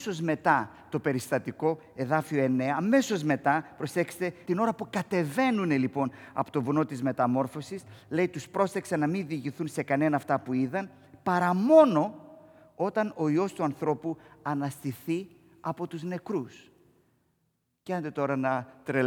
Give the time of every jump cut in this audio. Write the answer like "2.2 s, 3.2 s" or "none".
4.5 s